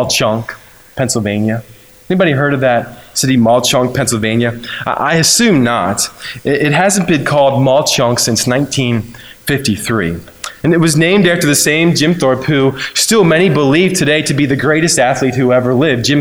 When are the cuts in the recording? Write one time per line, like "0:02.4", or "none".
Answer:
0:10.6